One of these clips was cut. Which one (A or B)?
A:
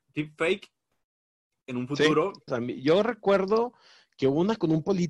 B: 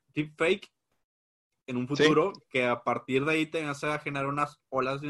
A